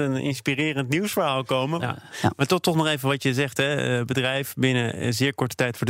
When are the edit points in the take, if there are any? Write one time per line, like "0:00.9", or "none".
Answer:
0:01.8

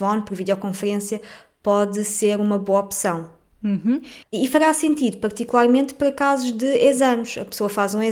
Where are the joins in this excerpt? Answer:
0:04.2

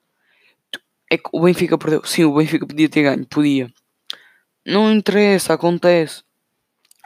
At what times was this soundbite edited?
none

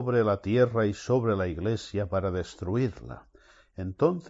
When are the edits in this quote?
none

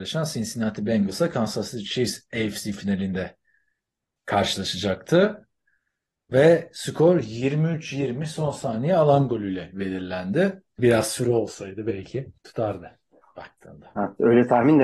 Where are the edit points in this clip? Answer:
0:10.8
0:12.4

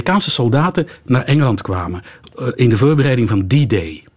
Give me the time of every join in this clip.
none

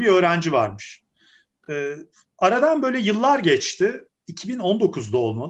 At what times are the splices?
none

